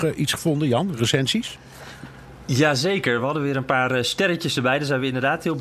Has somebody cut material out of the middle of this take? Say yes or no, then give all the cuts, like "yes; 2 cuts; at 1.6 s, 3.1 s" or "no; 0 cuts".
no; 0 cuts